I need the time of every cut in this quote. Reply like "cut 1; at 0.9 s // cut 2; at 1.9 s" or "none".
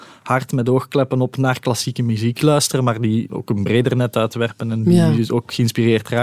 none